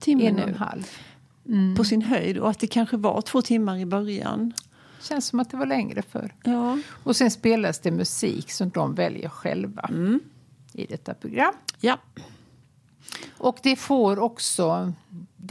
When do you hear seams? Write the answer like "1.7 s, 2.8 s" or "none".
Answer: none